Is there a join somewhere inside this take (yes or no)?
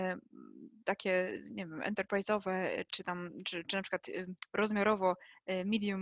no